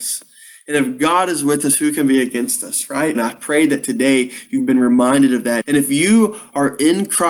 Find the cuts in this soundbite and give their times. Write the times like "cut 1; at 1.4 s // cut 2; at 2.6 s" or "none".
cut 1; at 3.1 s // cut 2; at 5.6 s